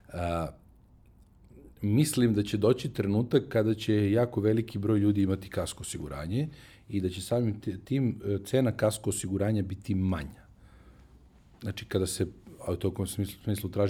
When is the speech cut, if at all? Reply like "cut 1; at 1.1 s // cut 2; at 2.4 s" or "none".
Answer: cut 1; at 7.6 s